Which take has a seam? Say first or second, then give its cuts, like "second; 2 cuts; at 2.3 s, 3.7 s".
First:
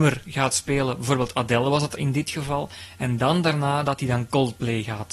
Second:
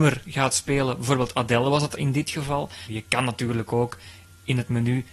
second; 1 cut; at 2.9 s